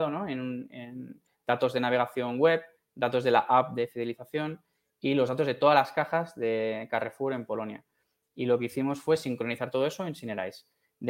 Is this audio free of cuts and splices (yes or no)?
yes